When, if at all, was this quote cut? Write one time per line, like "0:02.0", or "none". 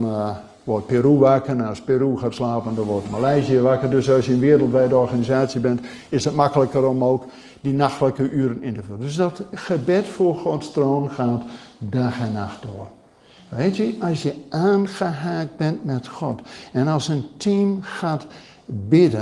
0:03.0